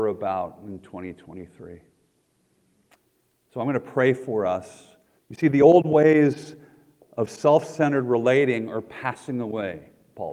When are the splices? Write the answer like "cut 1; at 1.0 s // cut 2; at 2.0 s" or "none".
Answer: cut 1; at 5.2 s